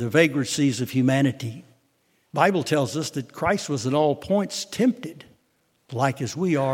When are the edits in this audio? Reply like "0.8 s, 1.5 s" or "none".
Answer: 2.2 s